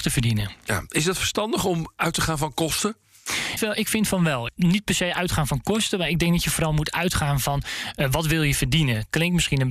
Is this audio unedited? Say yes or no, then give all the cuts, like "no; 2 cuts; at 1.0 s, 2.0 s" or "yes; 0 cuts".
no; 1 cut; at 3.6 s